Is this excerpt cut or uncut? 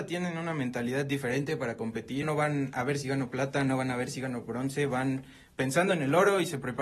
cut